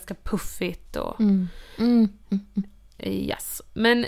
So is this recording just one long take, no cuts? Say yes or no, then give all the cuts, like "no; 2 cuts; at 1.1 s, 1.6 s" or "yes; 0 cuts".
yes; 0 cuts